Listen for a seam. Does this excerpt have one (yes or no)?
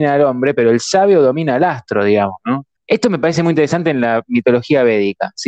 yes